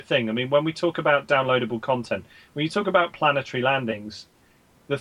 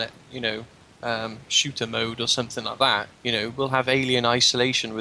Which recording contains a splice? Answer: second; 1 cut; at 3.1 s

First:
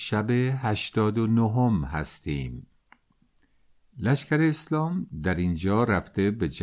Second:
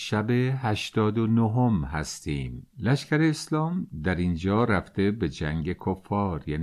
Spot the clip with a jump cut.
second; 1 cut; at 2.7 s

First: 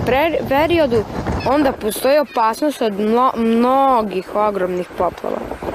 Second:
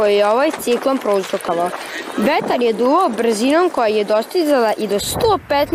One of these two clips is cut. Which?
first; 1 cut; at 1.4 s

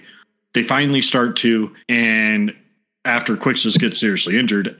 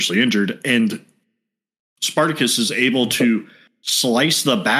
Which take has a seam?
first; 1 cut; at 1.8 s

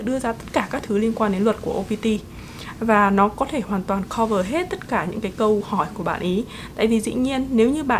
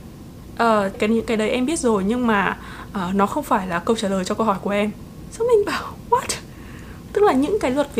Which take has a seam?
second; 2 cuts; at 0.9 s, 7.1 s

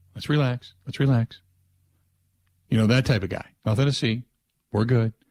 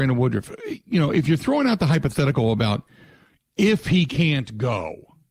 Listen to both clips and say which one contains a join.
first; 1 cut; at 3.6 s

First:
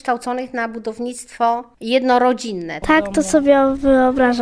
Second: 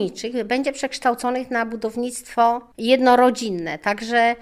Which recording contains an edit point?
first; 1 cut; at 2.8 s

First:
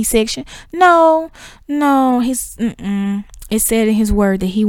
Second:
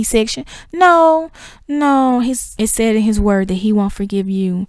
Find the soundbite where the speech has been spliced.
second; 1 cut; at 2.6 s

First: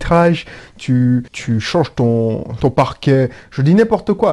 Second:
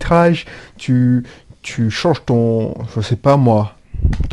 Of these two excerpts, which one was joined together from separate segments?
first; 2 cuts; at 1.3 s, 2.6 s

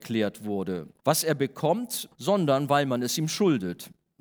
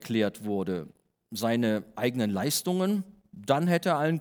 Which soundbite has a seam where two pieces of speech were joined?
first; 2 cuts; at 1.0 s, 2.1 s

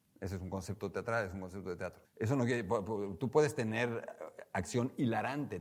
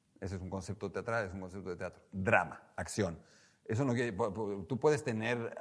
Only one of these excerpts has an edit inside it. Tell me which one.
first; 1 cut; at 2.0 s

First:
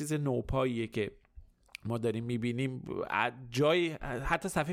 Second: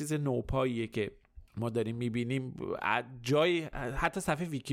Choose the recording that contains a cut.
second; 1 cut; at 1.5 s

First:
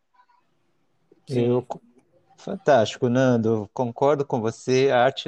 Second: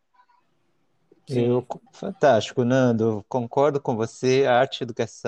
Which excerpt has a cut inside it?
second; 1 cut; at 1.9 s

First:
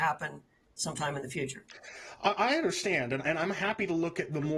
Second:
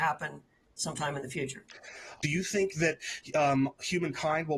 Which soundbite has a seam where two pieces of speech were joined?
second; 1 cut; at 2.2 s

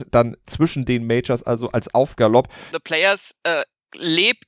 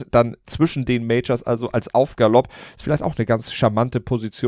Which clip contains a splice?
first; 1 cut; at 2.7 s

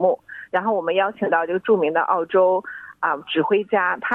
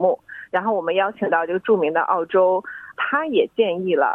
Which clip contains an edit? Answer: second; 1 cut; at 2.9 s

